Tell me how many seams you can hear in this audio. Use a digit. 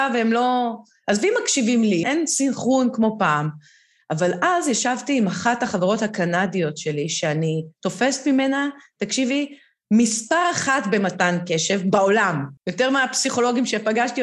2